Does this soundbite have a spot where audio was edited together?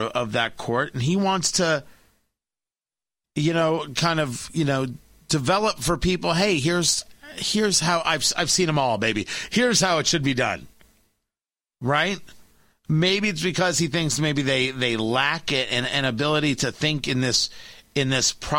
no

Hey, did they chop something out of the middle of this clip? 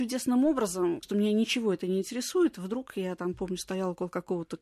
yes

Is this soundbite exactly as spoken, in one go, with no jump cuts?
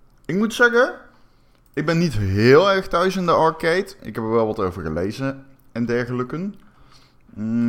yes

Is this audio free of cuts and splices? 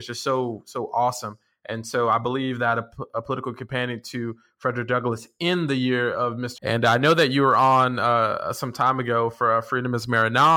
no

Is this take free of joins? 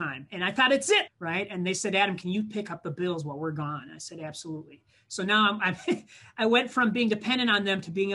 no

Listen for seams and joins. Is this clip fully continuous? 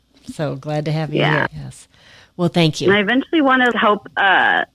no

